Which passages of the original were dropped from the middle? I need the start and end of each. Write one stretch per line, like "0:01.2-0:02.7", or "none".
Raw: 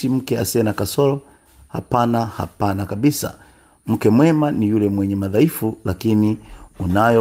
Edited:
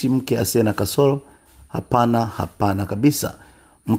none